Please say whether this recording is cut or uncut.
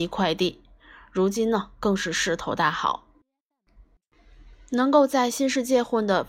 uncut